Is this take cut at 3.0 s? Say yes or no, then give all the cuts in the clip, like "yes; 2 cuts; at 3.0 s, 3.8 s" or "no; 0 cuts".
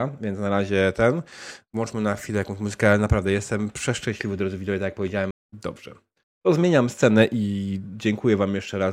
no; 1 cut; at 5.3 s